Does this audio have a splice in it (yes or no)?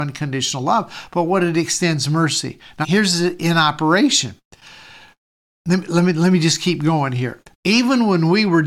yes